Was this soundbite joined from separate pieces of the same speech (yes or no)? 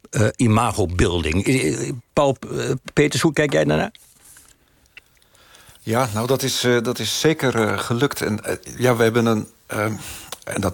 no